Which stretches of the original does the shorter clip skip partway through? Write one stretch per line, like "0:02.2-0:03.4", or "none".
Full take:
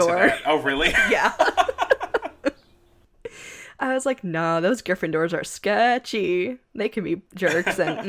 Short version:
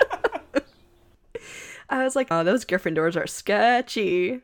0:04.2-0:04.5